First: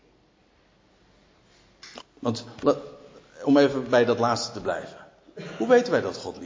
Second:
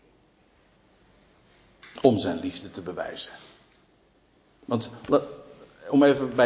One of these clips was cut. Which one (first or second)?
first